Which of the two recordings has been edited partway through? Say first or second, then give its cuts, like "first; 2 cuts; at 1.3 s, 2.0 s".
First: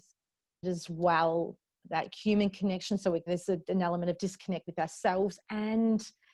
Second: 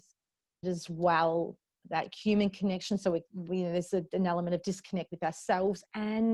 first; 1 cut; at 3.3 s